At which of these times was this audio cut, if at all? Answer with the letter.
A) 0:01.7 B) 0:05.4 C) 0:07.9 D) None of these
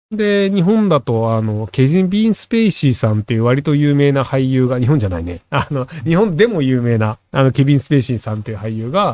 D